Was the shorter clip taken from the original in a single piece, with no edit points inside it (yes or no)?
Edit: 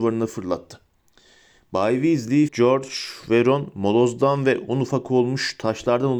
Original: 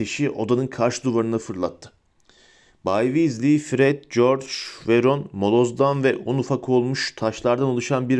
no